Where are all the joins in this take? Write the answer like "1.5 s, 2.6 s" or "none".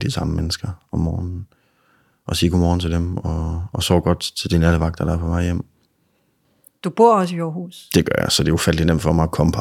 none